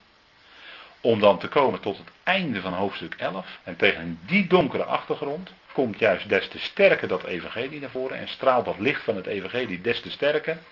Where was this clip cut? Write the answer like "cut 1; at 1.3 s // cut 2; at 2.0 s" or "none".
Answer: cut 1; at 3.6 s // cut 2; at 5.6 s